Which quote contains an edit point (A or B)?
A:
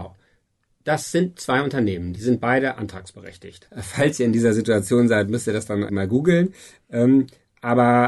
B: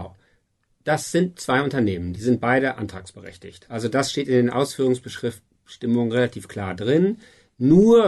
A